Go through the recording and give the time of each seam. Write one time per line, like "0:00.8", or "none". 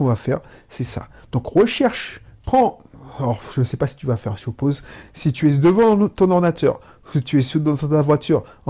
none